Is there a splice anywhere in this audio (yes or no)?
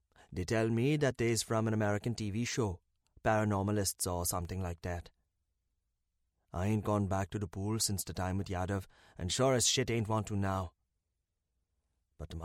no